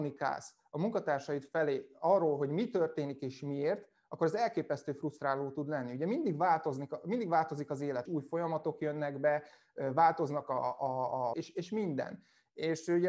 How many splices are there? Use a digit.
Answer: 2